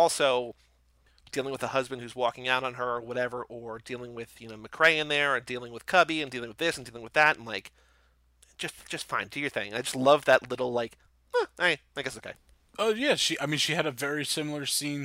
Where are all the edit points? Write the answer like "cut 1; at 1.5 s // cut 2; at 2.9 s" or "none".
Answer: none